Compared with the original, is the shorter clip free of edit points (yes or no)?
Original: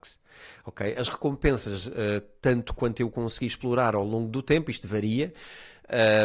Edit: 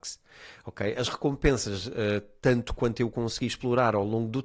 yes